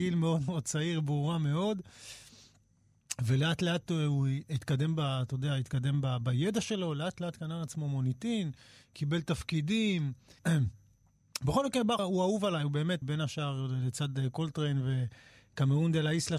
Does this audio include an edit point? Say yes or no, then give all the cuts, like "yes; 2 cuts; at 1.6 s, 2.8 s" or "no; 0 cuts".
yes; 3 cuts; at 10.4 s, 12.0 s, 13.0 s